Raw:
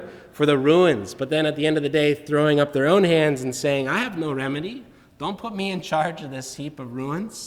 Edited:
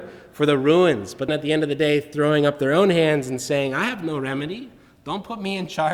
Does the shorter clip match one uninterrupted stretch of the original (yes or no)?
no